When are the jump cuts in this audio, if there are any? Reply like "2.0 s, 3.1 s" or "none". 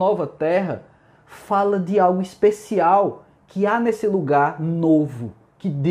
none

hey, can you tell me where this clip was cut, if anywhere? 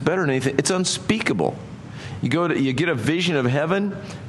none

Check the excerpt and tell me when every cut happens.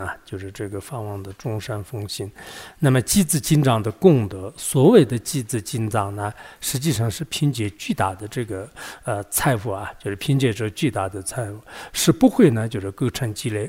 none

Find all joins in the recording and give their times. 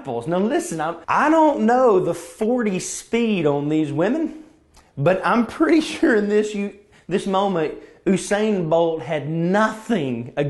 1.0 s

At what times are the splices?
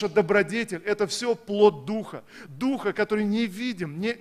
none

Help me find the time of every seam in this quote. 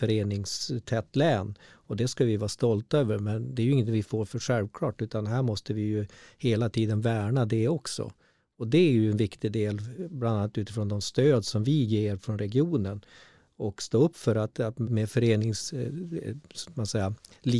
14.9 s

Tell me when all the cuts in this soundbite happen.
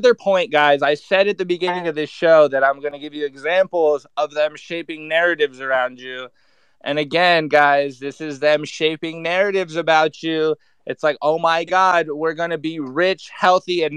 none

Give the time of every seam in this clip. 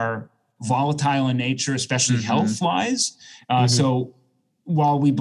none

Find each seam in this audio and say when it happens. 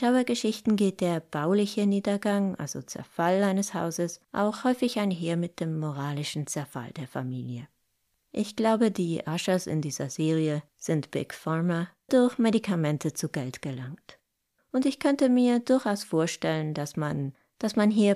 4.2 s, 12.1 s

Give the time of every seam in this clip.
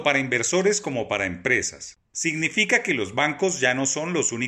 none

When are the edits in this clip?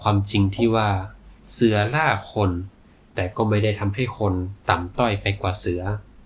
1.4 s

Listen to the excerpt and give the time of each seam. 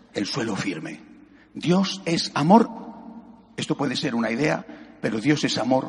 none

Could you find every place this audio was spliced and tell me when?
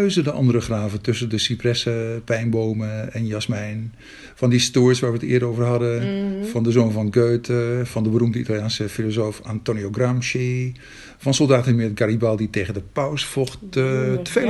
none

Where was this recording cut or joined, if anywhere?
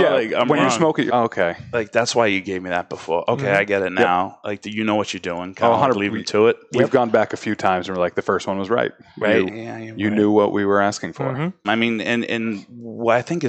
1.1 s, 9.5 s, 11.6 s

